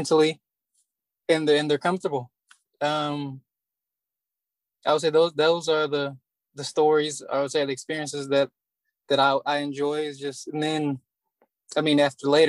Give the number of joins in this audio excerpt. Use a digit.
0